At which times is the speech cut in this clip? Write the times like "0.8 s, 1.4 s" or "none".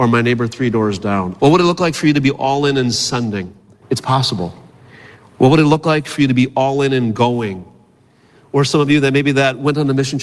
1.4 s, 3.8 s